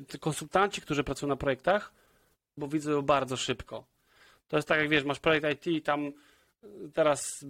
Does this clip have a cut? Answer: yes; 1 cut; at 2.6 s

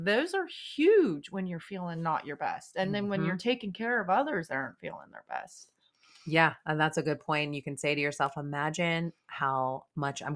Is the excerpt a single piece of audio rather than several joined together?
yes; 0 cuts

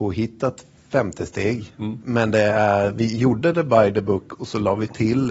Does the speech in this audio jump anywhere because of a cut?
yes; 1 cut; at 2.0 s

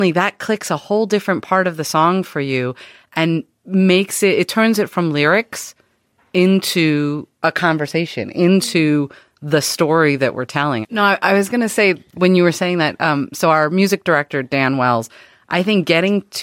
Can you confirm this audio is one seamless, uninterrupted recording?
no; 1 cut; at 10.8 s

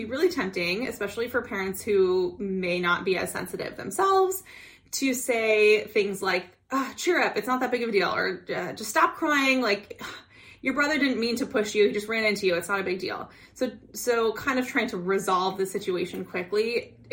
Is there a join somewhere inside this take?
no; 0 cuts

